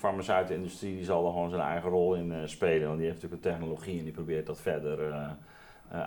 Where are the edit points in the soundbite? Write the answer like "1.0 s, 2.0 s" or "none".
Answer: none